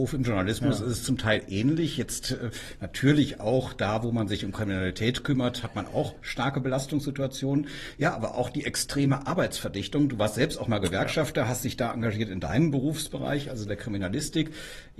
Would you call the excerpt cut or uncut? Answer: uncut